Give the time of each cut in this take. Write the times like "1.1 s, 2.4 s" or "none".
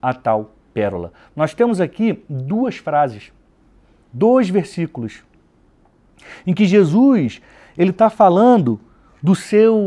none